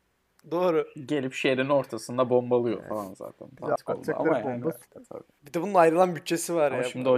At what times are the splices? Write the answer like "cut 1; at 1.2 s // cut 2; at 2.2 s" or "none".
cut 1; at 3.8 s // cut 2; at 4.8 s